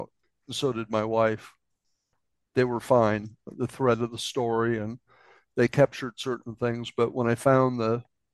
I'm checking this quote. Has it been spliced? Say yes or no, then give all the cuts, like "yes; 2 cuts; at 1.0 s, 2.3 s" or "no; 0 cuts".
no; 0 cuts